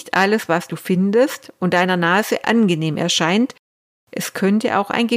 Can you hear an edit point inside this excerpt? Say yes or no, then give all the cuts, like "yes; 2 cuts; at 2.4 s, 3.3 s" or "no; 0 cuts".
no; 0 cuts